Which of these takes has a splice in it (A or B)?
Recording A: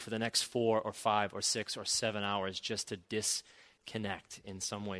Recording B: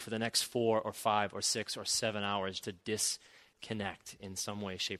B